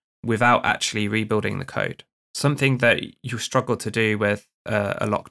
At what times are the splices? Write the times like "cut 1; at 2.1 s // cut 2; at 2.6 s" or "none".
none